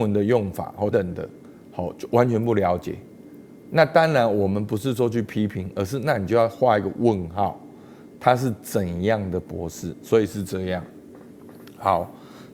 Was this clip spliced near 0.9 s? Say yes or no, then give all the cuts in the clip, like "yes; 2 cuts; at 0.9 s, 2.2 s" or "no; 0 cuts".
yes; 1 cut; at 0.9 s